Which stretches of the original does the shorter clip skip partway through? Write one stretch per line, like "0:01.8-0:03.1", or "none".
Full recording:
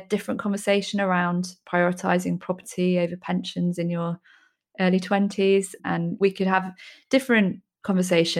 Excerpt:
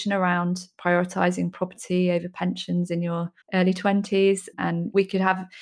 0:04.3-0:04.7